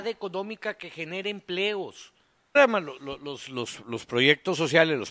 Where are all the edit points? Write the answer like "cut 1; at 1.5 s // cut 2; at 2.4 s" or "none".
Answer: cut 1; at 2.6 s

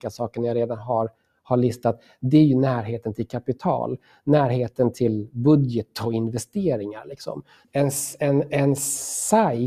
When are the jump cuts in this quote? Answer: cut 1; at 7.6 s

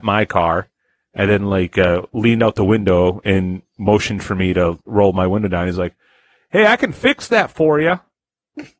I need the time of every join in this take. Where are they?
none

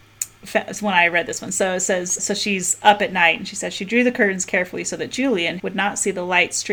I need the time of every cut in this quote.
cut 1; at 2.2 s // cut 2; at 5.6 s

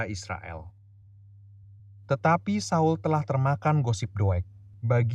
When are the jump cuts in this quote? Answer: none

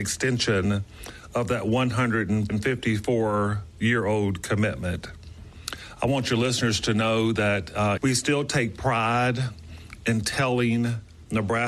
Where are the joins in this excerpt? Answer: cut 1; at 8.0 s

